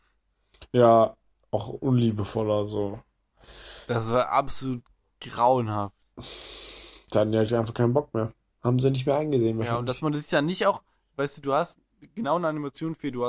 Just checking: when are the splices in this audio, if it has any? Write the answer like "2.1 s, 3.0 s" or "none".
none